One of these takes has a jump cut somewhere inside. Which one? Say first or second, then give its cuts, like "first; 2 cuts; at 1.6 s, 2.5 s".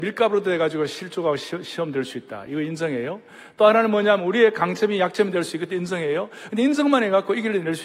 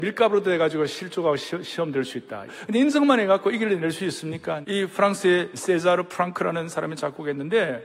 second; 2 cuts; at 2.5 s, 4.6 s